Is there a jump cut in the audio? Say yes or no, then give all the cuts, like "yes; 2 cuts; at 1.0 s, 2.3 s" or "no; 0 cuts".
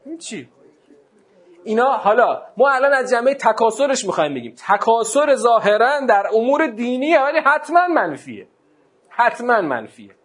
no; 0 cuts